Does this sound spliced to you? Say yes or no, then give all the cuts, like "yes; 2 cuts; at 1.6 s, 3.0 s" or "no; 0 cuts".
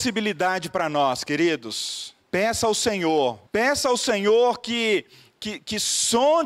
yes; 2 cuts; at 2.2 s, 3.5 s